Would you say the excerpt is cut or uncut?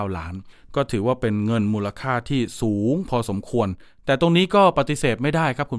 uncut